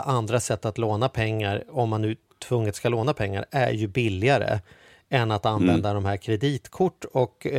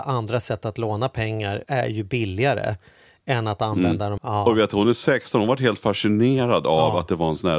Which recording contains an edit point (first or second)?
second